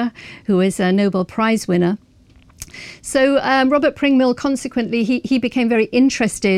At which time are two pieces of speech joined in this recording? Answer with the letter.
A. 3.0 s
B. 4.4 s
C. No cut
C